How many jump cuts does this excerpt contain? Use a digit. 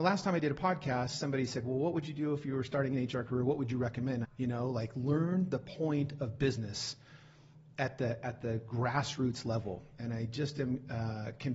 1